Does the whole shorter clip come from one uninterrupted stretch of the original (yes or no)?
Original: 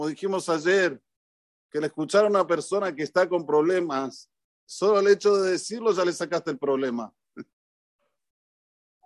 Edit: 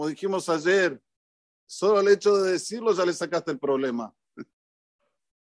no